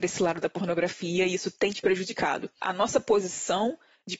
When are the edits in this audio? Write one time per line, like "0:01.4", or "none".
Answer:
0:02.6